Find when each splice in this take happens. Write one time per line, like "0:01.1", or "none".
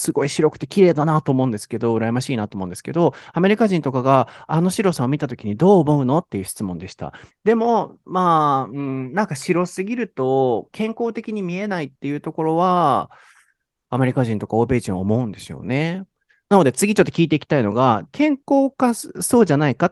0:07.3
0:18.1